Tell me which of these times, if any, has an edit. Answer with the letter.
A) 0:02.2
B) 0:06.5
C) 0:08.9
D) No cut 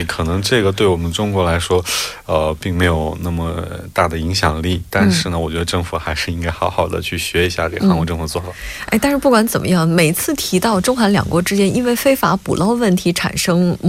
D